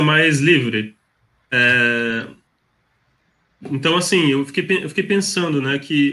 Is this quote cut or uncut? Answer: uncut